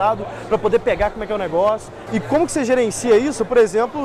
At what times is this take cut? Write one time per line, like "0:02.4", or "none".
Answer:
0:02.1